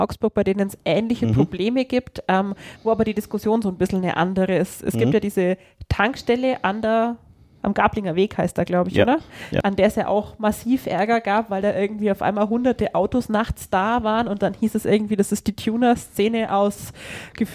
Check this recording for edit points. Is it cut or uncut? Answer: uncut